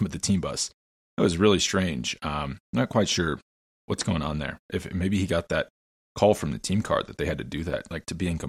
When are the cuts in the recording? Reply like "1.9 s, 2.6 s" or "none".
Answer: none